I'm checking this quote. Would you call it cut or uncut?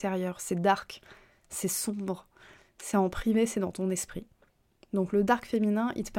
uncut